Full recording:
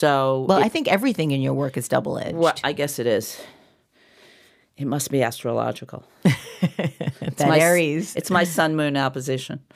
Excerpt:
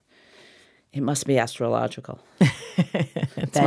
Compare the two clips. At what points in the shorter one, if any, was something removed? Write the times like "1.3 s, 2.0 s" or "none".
none